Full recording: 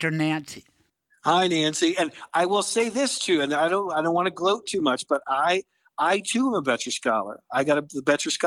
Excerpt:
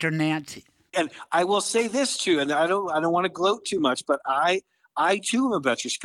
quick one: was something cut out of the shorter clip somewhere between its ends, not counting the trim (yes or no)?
yes